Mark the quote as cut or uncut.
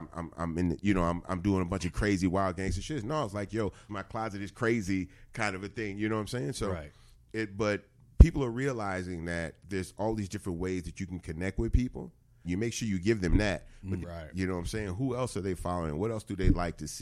cut